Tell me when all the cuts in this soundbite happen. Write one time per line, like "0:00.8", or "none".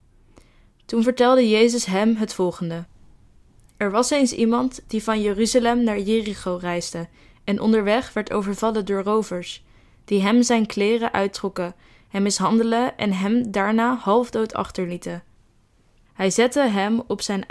0:16.1